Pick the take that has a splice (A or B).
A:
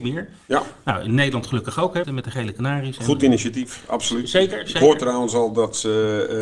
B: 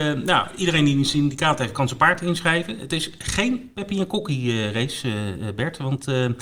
A